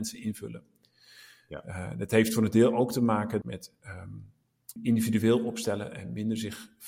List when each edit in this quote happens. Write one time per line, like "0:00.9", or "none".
0:03.4
0:04.8